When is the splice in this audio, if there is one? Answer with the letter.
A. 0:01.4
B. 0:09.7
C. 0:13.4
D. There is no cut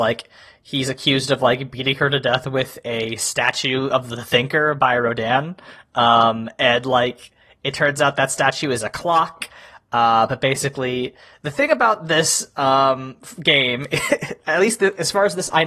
D